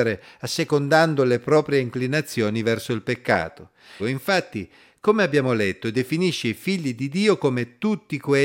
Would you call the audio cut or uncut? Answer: cut